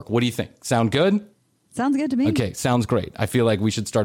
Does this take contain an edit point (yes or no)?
no